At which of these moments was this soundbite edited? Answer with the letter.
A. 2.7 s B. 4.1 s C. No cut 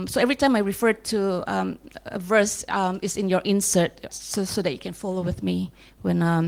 B